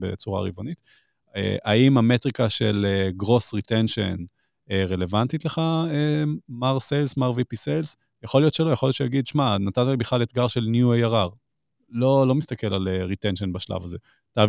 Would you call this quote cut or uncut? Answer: uncut